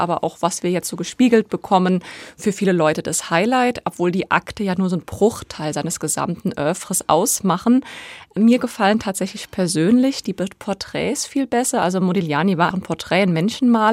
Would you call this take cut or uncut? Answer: cut